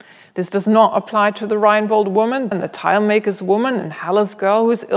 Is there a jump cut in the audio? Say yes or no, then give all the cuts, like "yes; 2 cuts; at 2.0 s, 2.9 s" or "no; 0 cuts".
yes; 1 cut; at 2.5 s